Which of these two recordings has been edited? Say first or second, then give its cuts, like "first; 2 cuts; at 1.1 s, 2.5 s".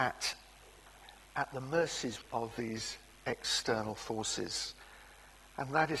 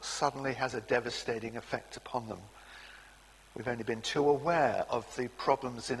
first; 1 cut; at 2.2 s